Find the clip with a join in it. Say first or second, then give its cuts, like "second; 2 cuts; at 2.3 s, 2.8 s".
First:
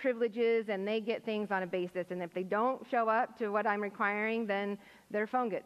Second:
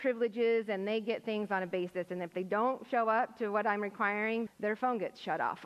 second; 1 cut; at 4.5 s